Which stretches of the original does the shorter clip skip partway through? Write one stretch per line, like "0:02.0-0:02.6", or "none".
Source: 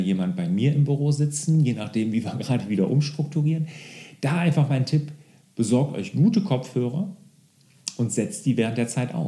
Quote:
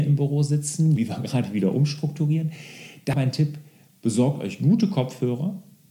0:01.7-0:02.1
0:04.3-0:04.7

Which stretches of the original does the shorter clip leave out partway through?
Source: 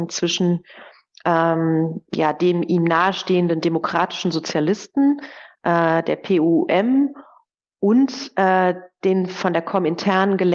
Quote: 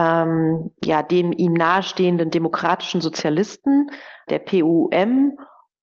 0:05.6-0:06.0

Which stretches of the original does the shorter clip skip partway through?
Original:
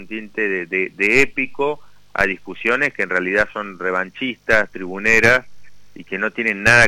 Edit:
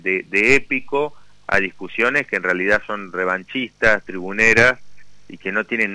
none

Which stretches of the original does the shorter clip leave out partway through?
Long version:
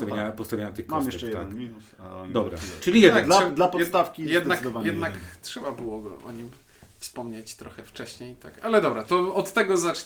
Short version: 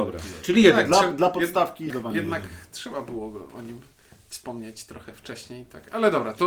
0:04.3-0:04.6

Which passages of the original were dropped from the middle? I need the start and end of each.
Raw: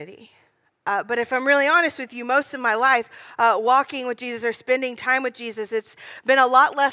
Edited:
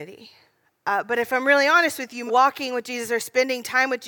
0:02.3-0:03.6

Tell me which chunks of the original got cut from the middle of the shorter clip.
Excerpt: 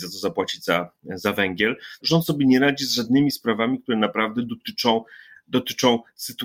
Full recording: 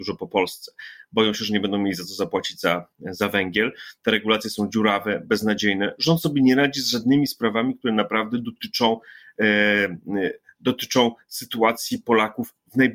0:04.0-0:06.0
0:09.3-0:10.5

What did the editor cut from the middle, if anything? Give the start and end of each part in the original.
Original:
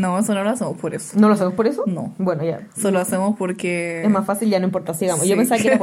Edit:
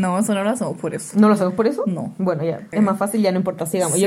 0:02.7-0:04.0

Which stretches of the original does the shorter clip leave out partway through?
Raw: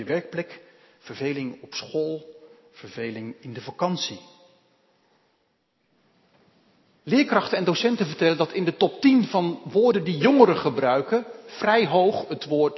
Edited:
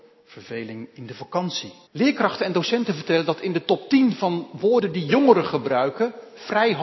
0:04.3-0:07.0

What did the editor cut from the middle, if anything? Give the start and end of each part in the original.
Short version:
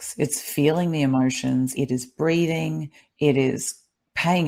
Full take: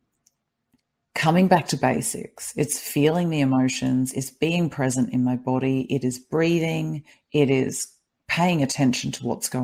0:04.1-0:05.9

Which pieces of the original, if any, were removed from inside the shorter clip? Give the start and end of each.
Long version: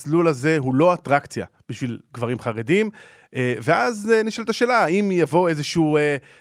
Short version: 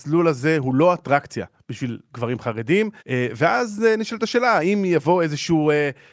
0:03.0-0:03.3

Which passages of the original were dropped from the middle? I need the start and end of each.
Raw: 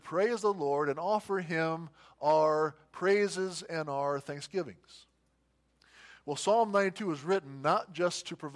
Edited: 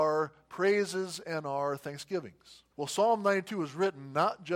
0:05.1-0:06.2

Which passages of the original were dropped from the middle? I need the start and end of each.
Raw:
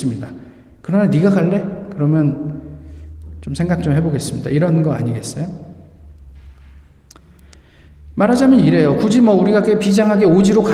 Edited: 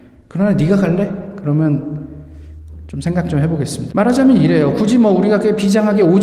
0:04.4-0:08.1

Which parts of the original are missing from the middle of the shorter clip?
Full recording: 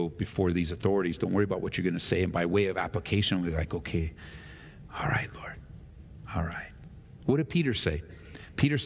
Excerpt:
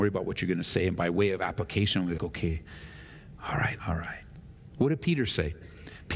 0:03.5-0:03.7
0:05.3-0:06.3

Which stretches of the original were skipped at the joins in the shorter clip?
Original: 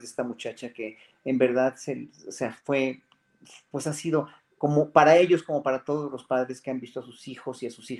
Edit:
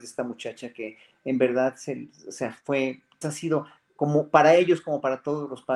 0:03.2-0:03.8

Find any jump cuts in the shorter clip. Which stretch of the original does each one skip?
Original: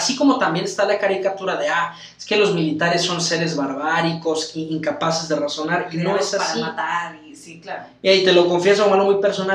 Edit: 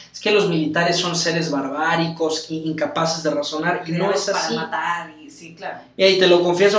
none

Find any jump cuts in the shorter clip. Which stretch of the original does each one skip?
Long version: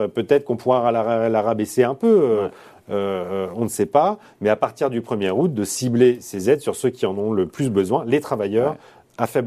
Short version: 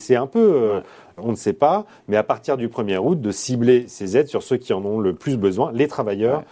0:02.9-0:03.5

